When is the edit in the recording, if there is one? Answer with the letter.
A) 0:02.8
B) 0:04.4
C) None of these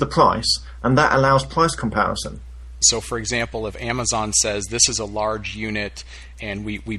A